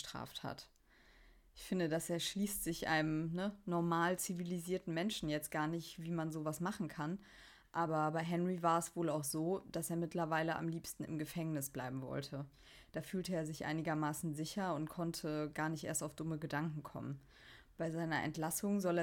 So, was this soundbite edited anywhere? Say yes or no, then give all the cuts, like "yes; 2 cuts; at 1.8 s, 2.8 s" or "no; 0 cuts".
no; 0 cuts